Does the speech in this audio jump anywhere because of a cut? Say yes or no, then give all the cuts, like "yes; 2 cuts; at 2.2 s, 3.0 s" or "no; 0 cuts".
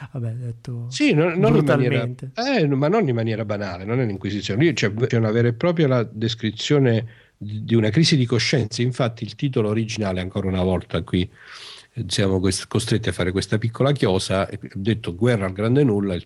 yes; 1 cut; at 5.1 s